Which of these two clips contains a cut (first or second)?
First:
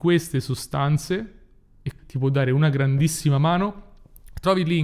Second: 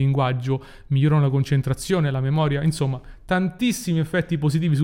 first